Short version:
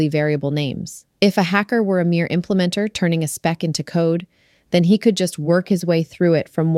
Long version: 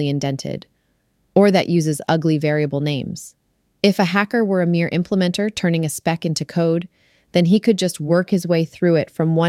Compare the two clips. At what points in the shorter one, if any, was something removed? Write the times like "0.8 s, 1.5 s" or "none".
1.1 s

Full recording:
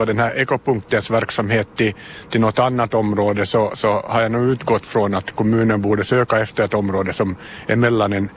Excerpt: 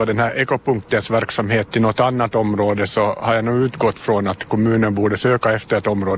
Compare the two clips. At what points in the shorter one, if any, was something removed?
1.7 s, 2.9 s

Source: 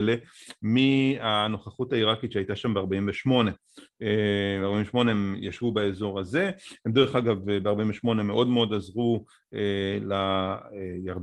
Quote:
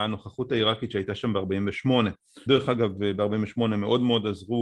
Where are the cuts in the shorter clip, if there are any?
2.5 s

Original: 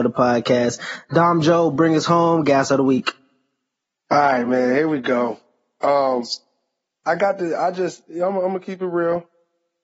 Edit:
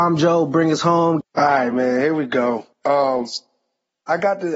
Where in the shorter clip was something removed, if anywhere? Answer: 1.2 s, 2.7 s

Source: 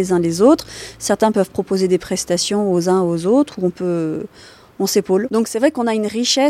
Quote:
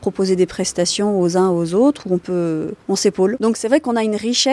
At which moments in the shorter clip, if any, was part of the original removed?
2.8 s

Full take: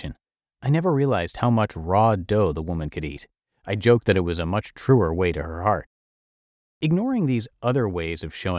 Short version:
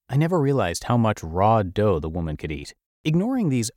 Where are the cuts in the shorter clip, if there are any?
2.9 s

